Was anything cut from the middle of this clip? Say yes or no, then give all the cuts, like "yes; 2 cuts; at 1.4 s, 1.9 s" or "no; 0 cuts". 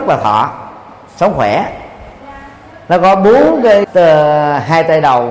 yes; 1 cut; at 3.8 s